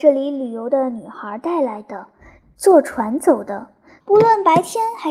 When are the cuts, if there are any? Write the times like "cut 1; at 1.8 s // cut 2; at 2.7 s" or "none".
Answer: cut 1; at 2.4 s // cut 2; at 4.0 s